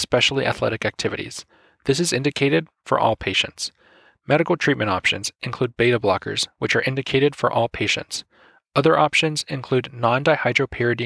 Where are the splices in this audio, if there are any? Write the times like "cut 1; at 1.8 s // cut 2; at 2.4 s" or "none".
none